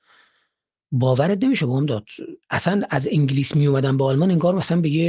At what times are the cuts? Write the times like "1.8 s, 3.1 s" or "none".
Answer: 2.4 s